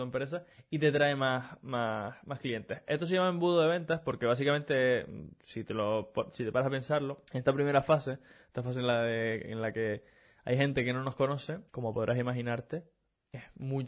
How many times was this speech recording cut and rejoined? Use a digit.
2